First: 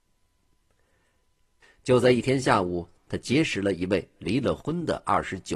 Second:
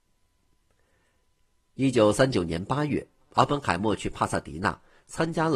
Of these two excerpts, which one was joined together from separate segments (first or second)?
first